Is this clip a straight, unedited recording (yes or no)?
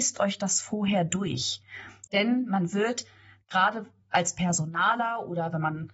no